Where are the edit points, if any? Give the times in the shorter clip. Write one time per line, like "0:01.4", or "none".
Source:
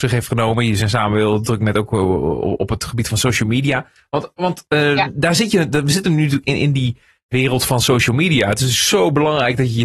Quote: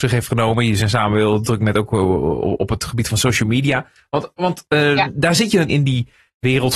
0:05.7